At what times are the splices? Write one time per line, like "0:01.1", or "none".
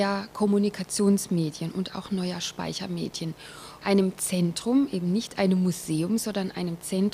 0:03.8